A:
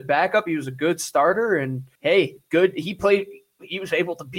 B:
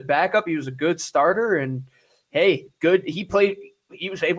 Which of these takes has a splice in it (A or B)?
A